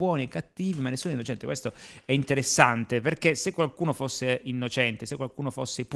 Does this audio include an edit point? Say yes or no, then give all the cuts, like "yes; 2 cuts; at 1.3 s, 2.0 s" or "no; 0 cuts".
no; 0 cuts